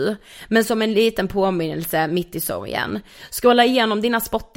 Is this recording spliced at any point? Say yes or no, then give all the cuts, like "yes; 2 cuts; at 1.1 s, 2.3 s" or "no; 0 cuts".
no; 0 cuts